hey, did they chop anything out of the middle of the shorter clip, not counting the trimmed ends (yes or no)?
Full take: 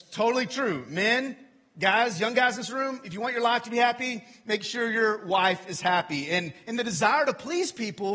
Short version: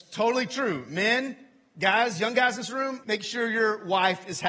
yes